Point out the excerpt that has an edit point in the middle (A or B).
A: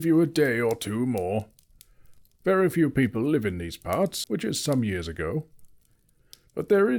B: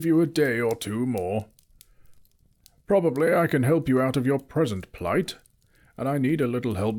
A